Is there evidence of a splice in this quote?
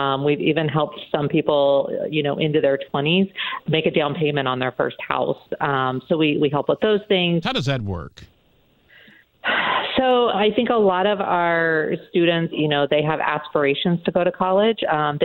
yes; 3 cuts; at 7.4 s, 10.3 s, 12.5 s

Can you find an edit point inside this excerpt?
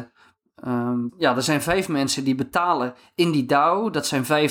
yes; 1 cut; at 1.1 s

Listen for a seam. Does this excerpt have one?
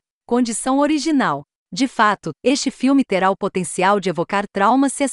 yes; 1 cut; at 2.3 s

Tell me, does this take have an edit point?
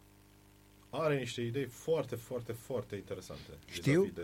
no; 0 cuts

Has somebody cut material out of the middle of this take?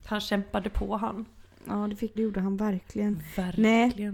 yes; 1 cut; at 2.2 s

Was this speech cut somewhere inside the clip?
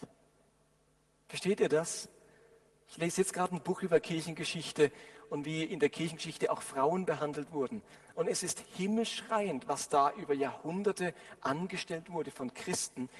no; 0 cuts

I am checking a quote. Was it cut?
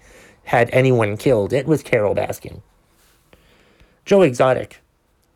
no; 0 cuts

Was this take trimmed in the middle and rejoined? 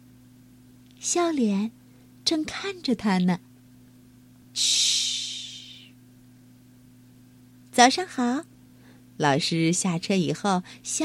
yes; 1 cut; at 4.4 s

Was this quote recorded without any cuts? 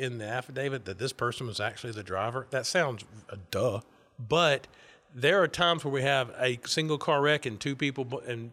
yes; 0 cuts

